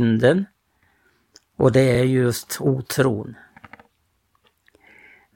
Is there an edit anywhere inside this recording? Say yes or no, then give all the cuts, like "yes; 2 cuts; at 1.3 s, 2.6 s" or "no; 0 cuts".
no; 0 cuts